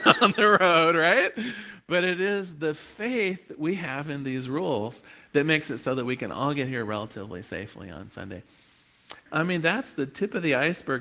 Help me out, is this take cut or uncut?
cut